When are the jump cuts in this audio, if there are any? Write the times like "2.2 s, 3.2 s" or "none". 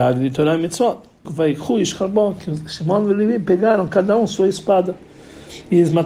1.3 s